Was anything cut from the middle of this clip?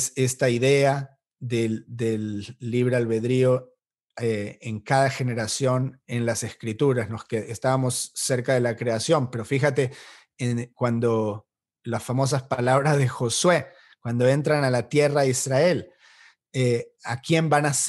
no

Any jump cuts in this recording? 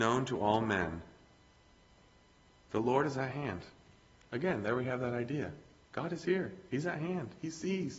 no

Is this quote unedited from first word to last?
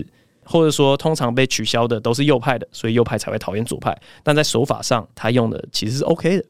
yes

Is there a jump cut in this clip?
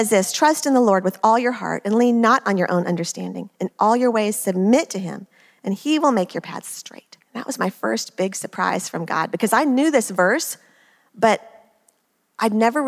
yes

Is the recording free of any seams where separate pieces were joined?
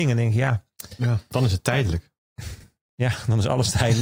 yes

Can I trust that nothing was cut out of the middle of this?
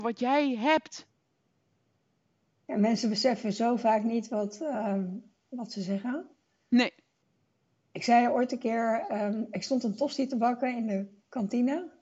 yes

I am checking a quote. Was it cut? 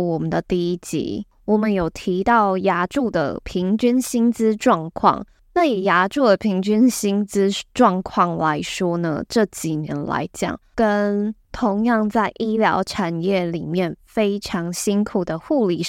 no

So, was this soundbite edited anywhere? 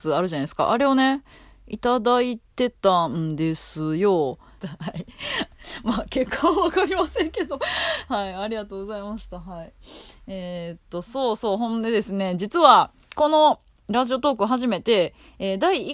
yes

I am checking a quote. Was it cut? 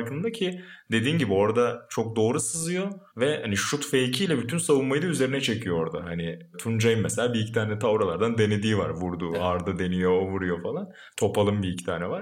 no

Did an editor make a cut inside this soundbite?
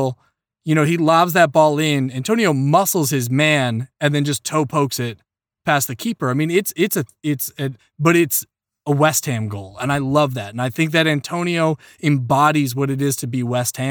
yes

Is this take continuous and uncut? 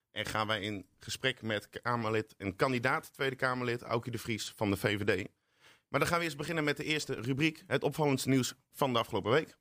yes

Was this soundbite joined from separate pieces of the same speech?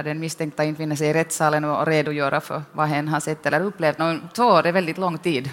yes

